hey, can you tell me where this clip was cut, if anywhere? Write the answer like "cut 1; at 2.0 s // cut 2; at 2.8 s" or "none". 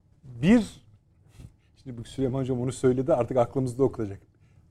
none